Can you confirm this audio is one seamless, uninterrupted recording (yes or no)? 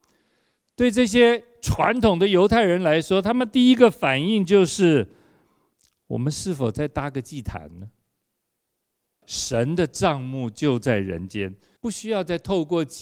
no